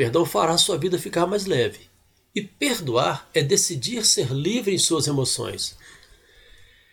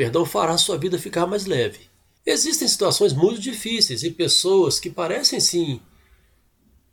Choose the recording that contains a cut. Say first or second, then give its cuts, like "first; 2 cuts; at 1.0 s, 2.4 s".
second; 1 cut; at 2.2 s